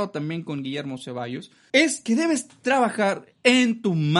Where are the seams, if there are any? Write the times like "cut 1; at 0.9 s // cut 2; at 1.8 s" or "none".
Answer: cut 1; at 1.7 s